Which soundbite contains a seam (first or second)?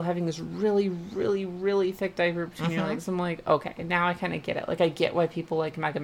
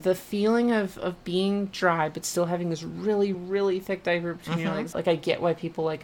second